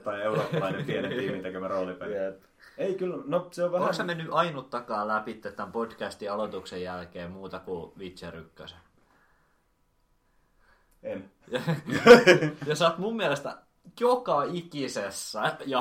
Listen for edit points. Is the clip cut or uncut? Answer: uncut